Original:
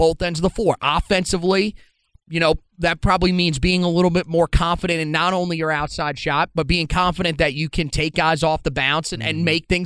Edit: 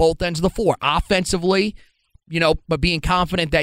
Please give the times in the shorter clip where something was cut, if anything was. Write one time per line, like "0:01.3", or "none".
0:02.7